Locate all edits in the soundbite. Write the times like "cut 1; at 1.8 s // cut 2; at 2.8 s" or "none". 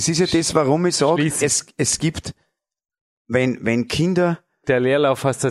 cut 1; at 1.4 s